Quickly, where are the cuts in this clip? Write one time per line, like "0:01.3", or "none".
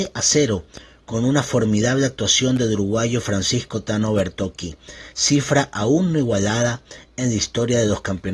0:05.1